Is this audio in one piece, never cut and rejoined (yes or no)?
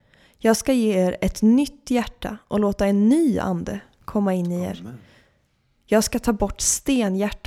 yes